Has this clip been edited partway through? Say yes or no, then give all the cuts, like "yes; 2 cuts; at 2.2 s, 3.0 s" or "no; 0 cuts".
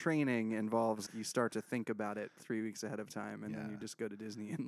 yes; 1 cut; at 1.1 s